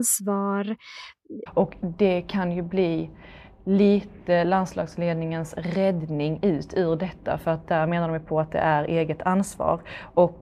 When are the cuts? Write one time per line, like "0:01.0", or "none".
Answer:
0:01.5